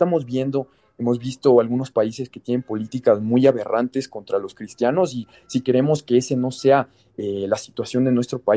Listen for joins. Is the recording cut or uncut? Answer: uncut